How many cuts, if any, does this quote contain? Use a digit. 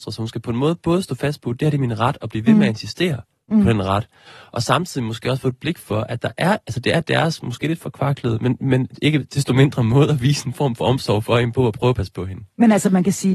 0